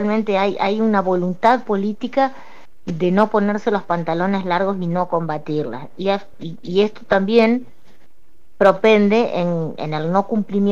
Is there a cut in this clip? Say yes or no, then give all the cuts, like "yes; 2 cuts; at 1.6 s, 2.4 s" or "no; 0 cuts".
no; 0 cuts